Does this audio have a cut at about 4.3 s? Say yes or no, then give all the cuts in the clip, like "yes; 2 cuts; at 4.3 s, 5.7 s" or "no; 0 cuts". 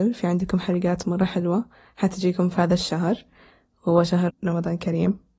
yes; 1 cut; at 4.3 s